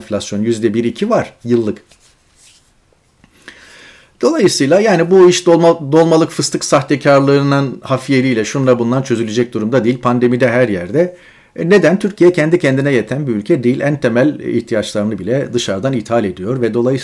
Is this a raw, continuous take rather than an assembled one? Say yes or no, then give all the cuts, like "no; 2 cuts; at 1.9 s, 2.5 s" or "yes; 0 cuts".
yes; 0 cuts